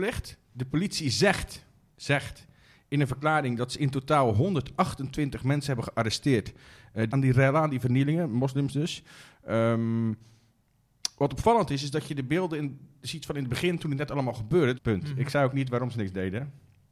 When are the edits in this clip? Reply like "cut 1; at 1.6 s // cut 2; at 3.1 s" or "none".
cut 1; at 7.1 s // cut 2; at 14.7 s